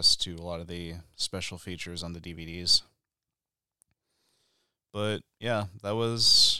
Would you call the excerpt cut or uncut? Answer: uncut